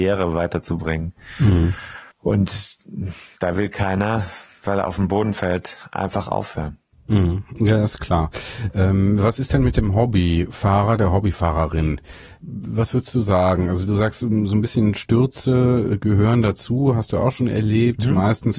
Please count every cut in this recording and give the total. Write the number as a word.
one